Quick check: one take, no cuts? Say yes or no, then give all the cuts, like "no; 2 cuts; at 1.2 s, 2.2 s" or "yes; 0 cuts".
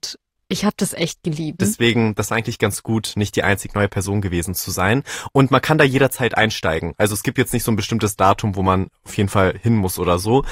no; 1 cut; at 1.6 s